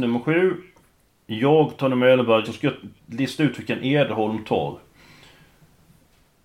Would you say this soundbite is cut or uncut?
cut